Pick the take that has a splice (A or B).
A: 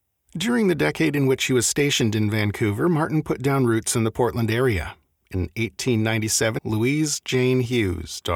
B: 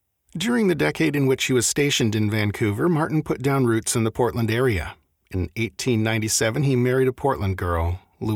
A